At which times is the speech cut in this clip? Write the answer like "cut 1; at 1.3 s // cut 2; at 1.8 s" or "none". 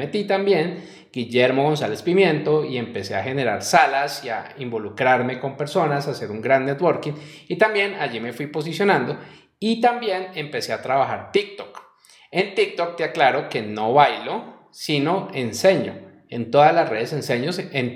none